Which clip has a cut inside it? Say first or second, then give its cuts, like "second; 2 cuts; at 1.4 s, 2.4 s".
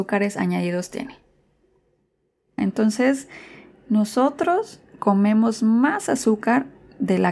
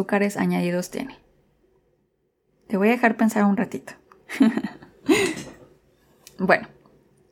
first; 1 cut; at 2.6 s